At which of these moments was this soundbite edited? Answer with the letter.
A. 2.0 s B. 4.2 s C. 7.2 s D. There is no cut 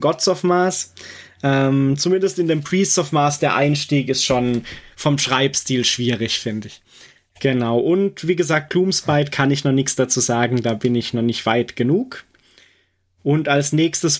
D